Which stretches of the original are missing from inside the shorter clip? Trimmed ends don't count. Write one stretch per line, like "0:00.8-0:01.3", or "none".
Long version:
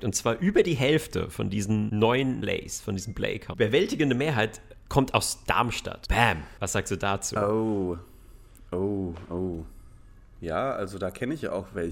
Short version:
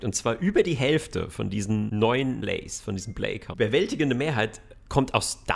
none